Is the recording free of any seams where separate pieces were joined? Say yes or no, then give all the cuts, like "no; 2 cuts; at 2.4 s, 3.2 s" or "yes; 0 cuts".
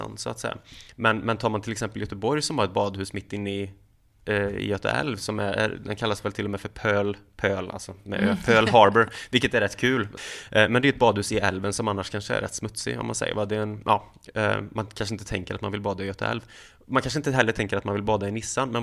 yes; 0 cuts